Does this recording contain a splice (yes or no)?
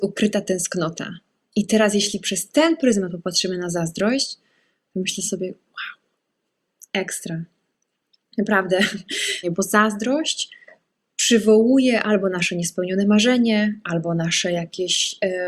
yes